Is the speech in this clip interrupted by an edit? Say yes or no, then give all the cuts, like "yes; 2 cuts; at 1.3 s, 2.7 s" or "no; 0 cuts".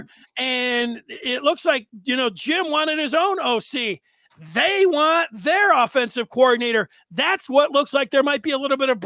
no; 0 cuts